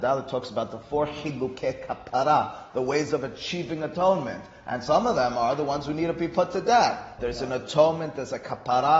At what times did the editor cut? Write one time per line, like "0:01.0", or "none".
0:07.2